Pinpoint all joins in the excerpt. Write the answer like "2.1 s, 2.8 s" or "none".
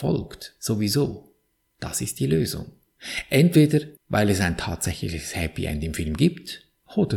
4.0 s